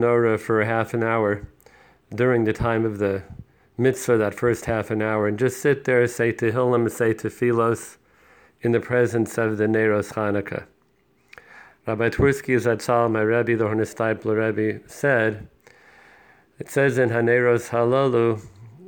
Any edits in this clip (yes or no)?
no